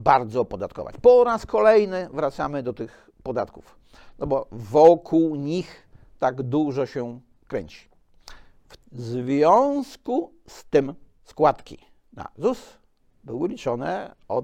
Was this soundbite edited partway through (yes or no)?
yes